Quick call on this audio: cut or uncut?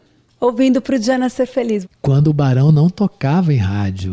cut